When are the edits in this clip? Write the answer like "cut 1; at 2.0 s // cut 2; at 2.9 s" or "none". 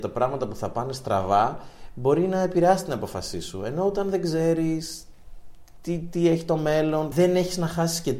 cut 1; at 7.1 s